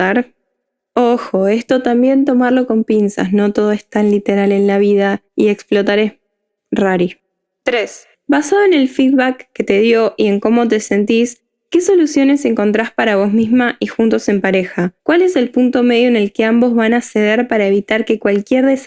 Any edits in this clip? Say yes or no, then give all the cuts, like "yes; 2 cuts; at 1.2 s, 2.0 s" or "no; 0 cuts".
yes; 3 cuts; at 5.3 s, 8.1 s, 15.0 s